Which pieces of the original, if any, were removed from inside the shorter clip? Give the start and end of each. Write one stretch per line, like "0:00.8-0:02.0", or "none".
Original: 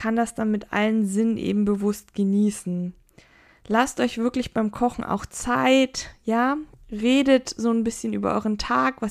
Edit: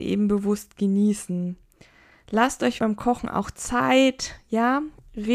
0:04.1-0:04.5